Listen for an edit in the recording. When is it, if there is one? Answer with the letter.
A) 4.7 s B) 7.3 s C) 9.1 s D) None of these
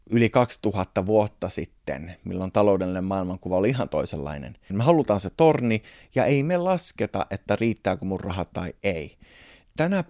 A